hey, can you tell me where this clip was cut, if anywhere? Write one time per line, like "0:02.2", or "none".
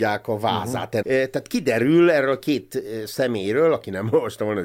0:01.0